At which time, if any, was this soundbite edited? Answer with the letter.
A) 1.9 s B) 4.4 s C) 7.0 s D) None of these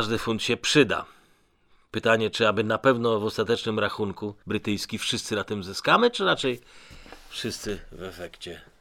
B